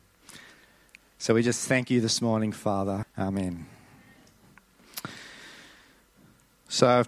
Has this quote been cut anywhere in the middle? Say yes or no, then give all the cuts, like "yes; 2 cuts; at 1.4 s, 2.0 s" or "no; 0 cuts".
yes; 1 cut; at 3.0 s